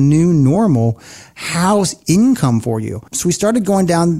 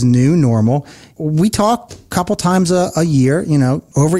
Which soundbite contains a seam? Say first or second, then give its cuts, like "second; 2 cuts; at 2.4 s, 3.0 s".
first; 1 cut; at 3.1 s